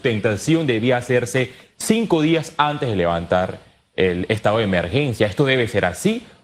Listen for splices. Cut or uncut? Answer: uncut